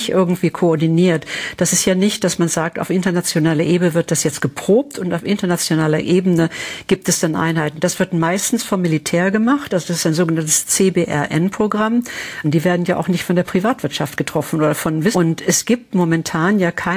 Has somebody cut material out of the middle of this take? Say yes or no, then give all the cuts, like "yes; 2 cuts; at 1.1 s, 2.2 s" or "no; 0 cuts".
yes; 3 cuts; at 9.7 s, 12.4 s, 15.1 s